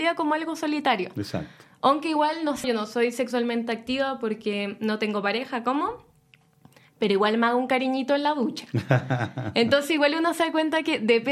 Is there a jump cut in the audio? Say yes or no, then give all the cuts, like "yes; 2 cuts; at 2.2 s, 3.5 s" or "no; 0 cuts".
yes; 1 cut; at 2.6 s